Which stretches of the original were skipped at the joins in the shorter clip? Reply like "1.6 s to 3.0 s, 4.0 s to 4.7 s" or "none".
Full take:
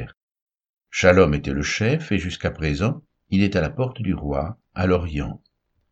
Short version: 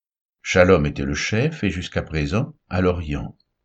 3.1 s to 4.7 s